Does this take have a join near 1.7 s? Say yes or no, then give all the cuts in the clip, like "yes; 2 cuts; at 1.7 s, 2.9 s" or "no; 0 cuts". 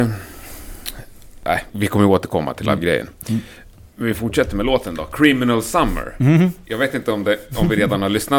yes; 1 cut; at 1.7 s